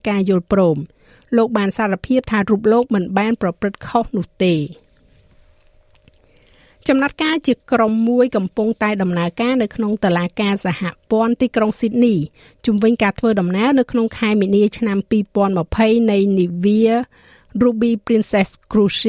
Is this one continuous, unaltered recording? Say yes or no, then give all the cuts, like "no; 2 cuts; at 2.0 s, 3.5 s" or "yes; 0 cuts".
yes; 0 cuts